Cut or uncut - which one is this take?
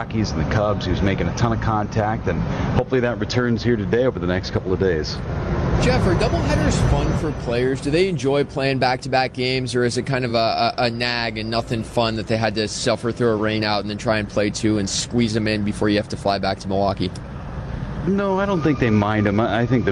uncut